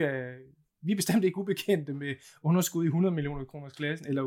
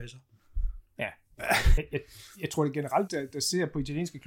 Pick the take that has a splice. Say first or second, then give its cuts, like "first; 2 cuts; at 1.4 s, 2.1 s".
second; 2 cuts; at 1.8 s, 3.1 s